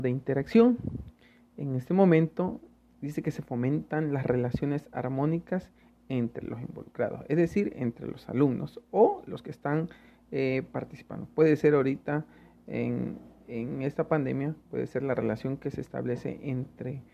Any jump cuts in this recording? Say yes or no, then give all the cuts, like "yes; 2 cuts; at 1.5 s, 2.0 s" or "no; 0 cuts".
no; 0 cuts